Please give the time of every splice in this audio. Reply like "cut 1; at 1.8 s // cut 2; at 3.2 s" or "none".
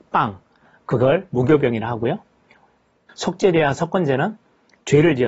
cut 1; at 3.1 s